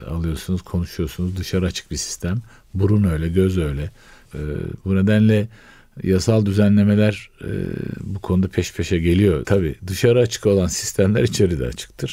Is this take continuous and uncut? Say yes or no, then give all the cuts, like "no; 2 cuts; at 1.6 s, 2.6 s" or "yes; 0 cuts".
no; 2 cuts; at 4.3 s, 9.4 s